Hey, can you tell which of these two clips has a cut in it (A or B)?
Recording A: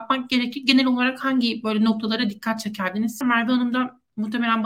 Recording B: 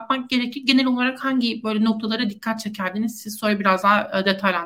A